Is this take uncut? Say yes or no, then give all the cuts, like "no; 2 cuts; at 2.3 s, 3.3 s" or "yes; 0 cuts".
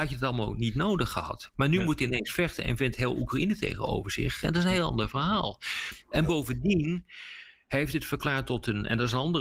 yes; 0 cuts